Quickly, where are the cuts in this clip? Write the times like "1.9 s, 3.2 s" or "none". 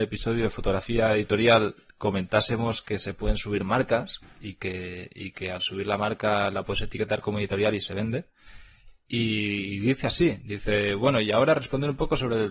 none